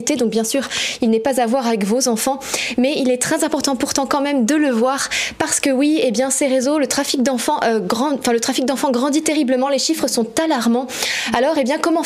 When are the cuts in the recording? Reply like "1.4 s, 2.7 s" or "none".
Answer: none